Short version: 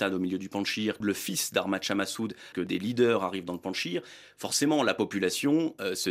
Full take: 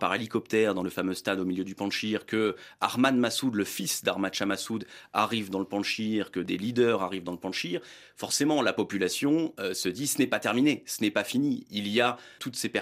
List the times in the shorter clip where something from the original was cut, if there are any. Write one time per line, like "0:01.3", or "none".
0:01.0
0:02.5

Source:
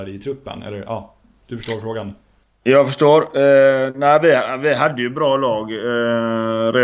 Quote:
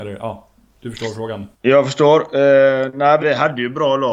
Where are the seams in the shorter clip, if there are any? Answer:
0:01.5
0:03.2

